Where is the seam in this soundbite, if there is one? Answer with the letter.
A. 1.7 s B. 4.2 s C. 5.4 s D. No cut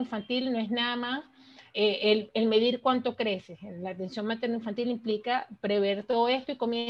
A